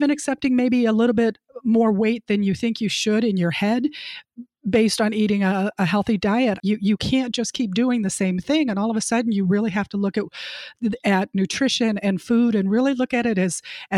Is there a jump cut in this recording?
yes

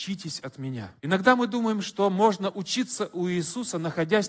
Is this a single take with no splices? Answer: no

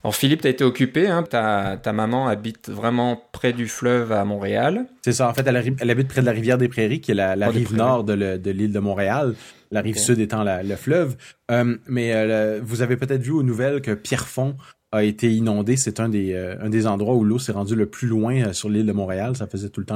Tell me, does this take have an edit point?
yes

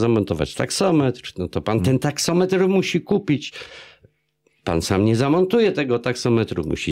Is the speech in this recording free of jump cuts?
yes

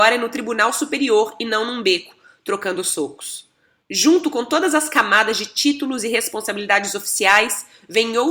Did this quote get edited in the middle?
no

